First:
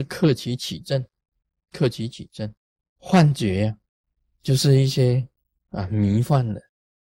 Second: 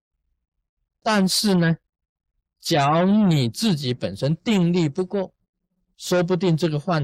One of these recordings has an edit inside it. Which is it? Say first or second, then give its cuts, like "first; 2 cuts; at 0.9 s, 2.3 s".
first; 1 cut; at 3.0 s